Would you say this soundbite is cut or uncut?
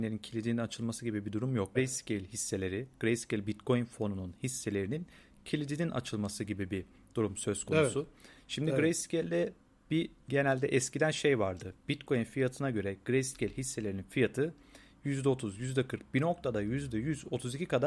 cut